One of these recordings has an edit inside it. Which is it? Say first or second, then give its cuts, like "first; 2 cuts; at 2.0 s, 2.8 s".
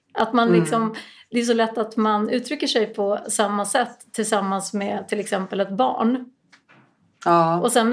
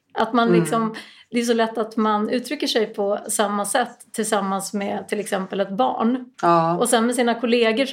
second; 1 cut; at 6.3 s